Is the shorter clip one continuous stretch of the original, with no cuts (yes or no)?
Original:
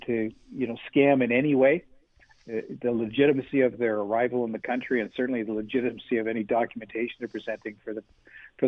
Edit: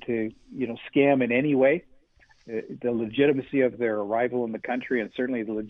yes